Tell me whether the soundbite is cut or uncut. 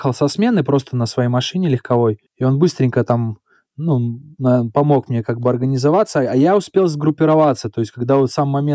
cut